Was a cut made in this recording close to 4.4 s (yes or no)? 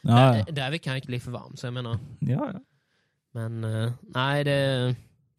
no